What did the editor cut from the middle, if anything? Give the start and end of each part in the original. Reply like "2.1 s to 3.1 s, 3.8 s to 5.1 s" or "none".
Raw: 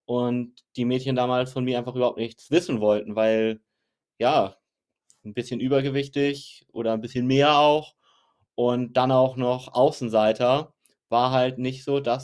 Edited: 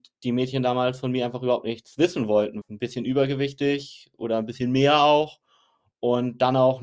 3.1 s to 5.2 s